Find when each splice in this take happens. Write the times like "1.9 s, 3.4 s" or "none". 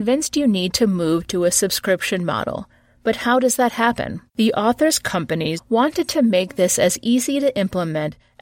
4.3 s, 5.6 s

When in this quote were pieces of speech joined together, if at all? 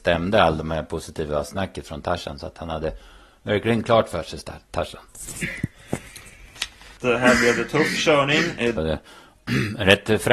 7.0 s, 8.8 s

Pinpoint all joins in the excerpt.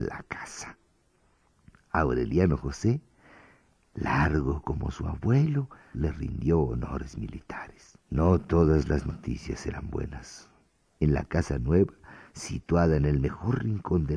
5.9 s, 8.0 s, 10.9 s

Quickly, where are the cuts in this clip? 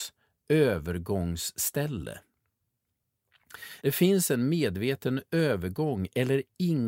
3.8 s

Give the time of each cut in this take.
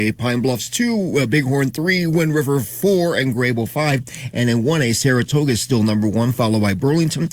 none

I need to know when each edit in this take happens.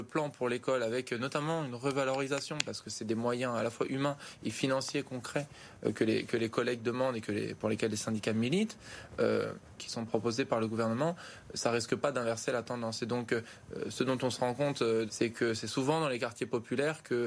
9.8 s, 15.1 s

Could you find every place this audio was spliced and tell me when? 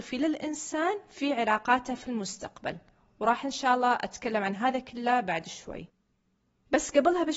none

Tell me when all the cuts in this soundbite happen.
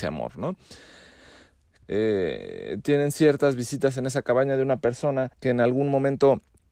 1.8 s, 5.3 s

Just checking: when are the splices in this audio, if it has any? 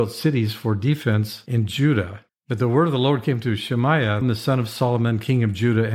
2.3 s, 4.2 s

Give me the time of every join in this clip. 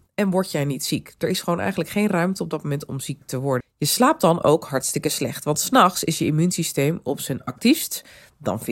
3.6 s

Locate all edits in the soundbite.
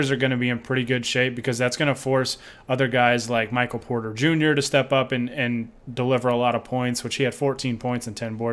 5.8 s

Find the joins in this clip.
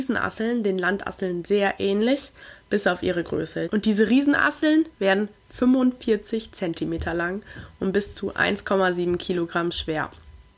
3.7 s

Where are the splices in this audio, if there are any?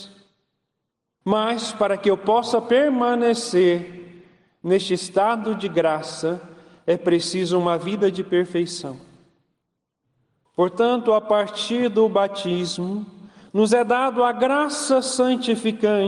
1.2 s, 10.4 s

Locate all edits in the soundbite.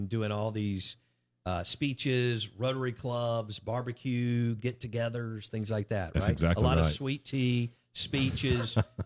none

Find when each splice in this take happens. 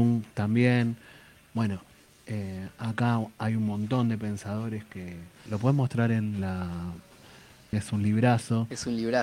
5.5 s, 7.7 s

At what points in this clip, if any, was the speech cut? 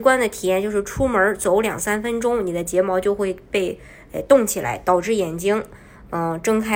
none

